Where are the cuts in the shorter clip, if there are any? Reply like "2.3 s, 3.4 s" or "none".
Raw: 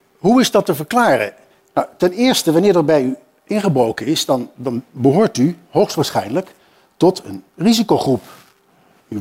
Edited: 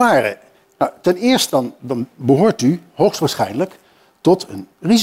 1.5 s